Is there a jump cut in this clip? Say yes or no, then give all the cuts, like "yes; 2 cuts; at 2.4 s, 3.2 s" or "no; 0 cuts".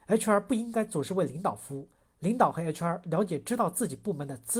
no; 0 cuts